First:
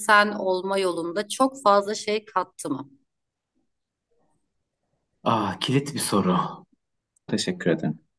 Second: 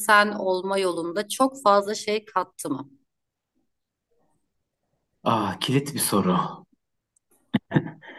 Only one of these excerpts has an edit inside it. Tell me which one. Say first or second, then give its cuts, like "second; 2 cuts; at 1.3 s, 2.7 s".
first; 1 cut; at 7.3 s